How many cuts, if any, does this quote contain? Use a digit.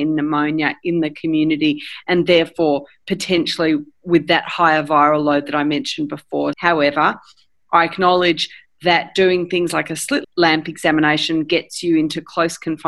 2